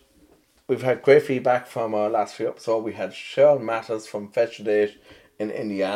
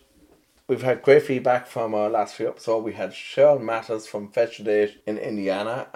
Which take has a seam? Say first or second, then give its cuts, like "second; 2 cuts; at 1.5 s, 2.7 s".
second; 1 cut; at 5.0 s